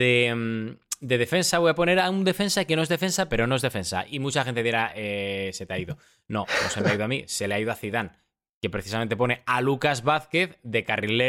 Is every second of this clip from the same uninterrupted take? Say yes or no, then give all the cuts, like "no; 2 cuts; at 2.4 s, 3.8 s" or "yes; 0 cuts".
no; 1 cut; at 3.3 s